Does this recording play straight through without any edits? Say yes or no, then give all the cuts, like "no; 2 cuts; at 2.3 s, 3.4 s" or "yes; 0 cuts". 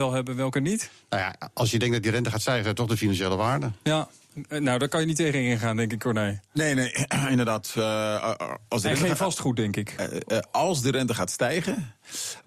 yes; 0 cuts